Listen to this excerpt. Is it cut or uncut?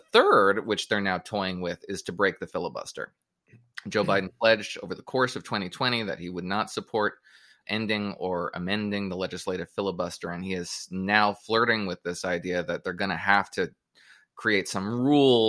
cut